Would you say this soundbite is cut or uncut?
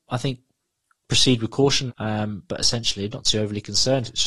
cut